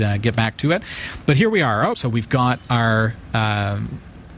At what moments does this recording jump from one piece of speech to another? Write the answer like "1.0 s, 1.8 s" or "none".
1.9 s